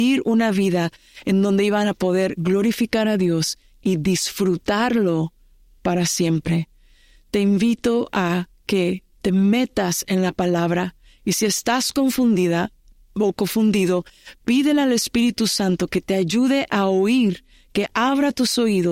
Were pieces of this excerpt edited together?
yes; 1 cut; at 9.1 s

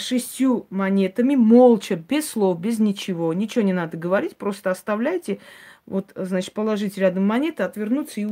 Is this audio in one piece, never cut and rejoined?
yes; 0 cuts

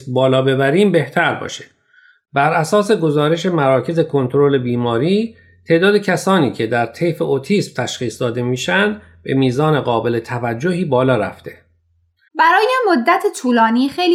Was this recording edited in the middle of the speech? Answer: yes; 1 cut; at 12.3 s

